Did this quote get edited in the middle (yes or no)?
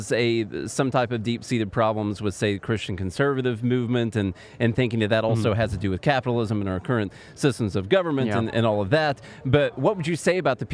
no